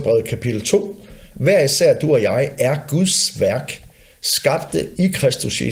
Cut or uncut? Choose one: cut